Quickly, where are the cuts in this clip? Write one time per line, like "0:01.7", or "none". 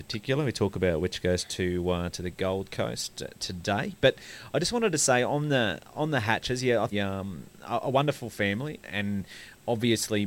0:06.9
0:08.8